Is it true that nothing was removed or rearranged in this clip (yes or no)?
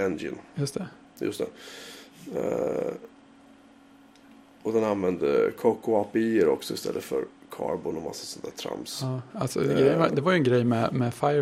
yes